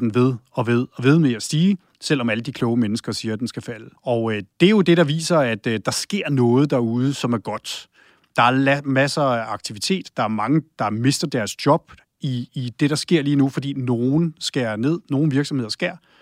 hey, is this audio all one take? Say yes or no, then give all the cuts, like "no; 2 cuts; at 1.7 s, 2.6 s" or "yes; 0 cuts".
no; 1 cut; at 4.0 s